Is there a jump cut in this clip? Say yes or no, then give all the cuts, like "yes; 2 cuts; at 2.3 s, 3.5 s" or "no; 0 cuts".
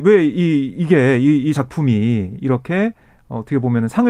no; 0 cuts